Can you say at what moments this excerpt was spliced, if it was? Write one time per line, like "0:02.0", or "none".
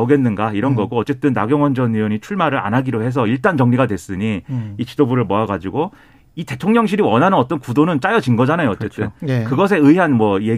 none